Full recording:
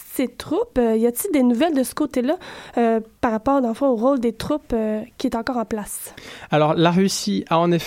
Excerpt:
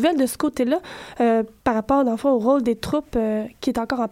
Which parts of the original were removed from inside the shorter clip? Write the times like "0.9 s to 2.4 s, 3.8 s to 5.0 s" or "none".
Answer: none